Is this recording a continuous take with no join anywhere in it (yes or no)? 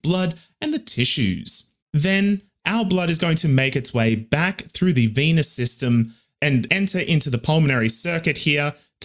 no